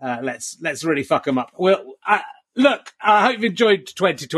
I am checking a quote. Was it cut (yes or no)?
no